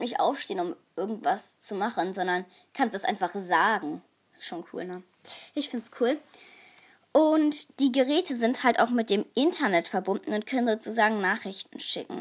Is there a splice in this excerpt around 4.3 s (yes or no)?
no